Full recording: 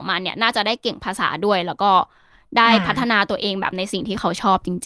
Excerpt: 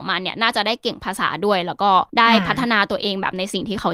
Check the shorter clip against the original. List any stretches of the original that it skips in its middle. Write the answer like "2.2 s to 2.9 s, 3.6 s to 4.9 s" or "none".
2.1 s to 2.5 s